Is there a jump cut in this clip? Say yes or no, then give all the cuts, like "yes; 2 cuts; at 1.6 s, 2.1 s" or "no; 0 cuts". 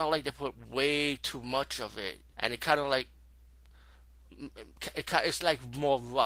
yes; 1 cut; at 2.3 s